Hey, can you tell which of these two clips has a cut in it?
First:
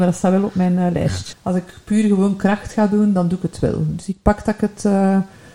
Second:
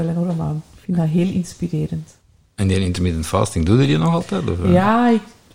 first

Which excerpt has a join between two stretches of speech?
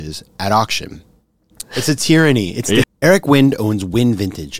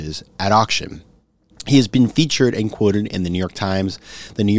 first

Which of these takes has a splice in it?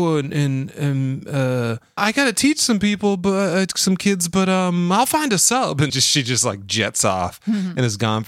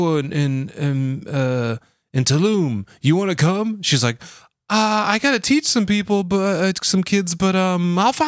first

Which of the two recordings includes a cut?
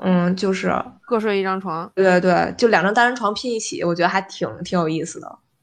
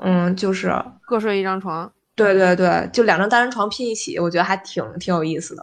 first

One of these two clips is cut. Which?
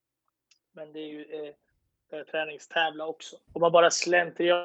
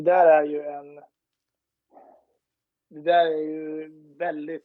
first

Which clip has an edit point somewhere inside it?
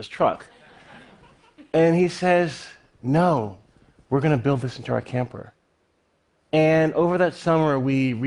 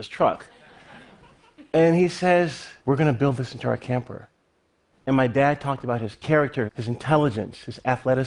second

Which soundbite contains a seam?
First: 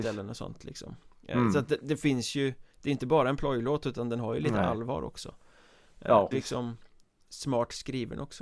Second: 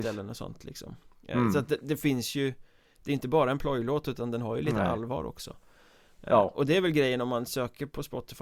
first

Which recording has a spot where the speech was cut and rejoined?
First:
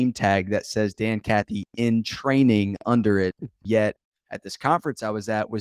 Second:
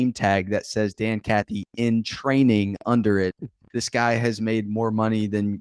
first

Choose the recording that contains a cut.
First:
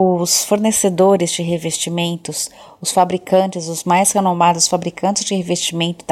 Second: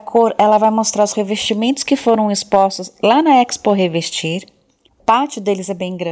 second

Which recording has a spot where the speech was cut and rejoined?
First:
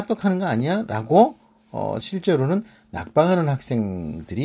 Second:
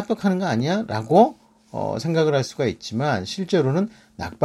first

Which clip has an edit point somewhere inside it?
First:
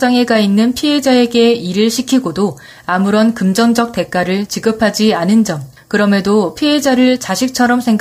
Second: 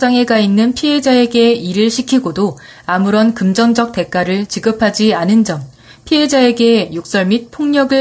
first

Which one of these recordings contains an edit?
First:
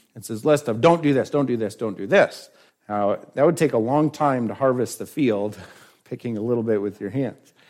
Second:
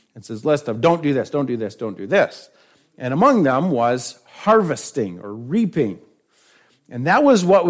first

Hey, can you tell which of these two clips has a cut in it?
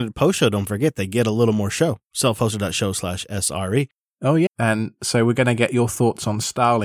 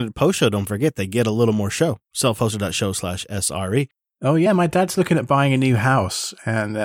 first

